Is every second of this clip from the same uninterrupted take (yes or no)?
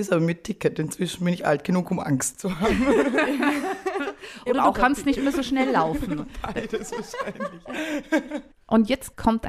yes